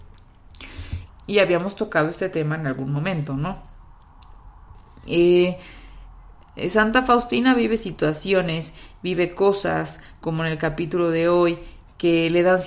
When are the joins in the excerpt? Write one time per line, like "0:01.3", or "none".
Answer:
0:01.1